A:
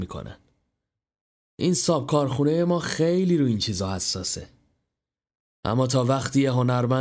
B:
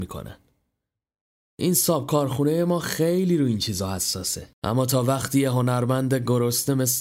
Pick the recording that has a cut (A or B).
B